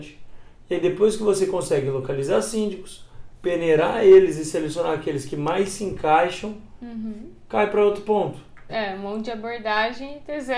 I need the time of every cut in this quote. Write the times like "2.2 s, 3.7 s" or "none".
8.7 s